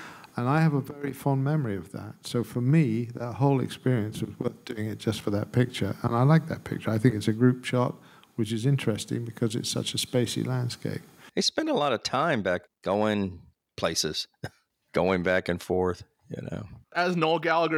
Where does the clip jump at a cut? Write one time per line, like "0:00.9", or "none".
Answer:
0:12.7

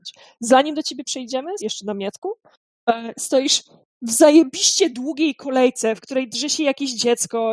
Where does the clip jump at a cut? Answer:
0:01.6
0:03.1

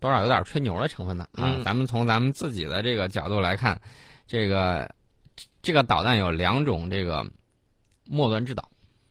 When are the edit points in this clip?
none

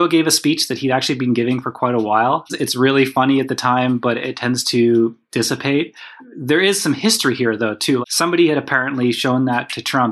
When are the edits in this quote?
0:02.5
0:08.0

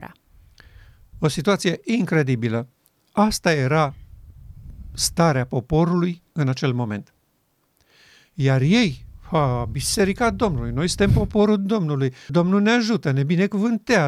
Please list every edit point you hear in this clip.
0:01.1
0:12.3

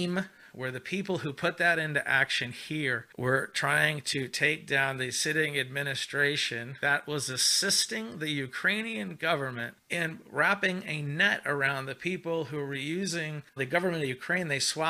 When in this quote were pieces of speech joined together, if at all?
0:13.6

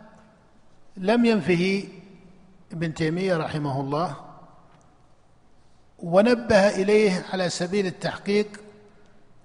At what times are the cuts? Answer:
none

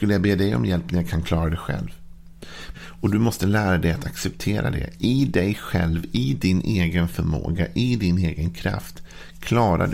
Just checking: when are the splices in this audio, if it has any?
0:02.7

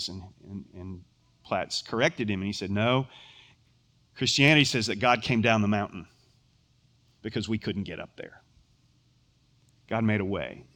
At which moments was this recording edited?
none

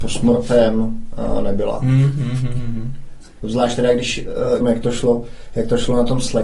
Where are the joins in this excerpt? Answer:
0:03.4
0:04.6

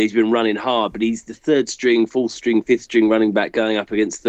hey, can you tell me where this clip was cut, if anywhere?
none

